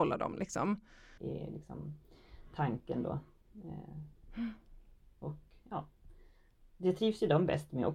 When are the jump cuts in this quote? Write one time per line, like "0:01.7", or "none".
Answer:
0:01.2

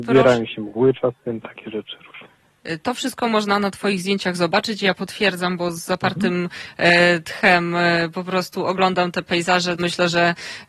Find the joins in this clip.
0:09.8

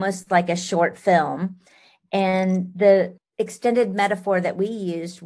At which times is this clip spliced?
none

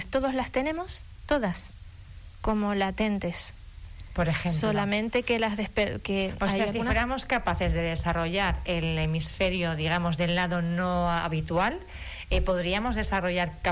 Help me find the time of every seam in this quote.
none

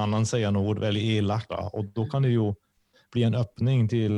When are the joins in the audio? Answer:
0:01.5

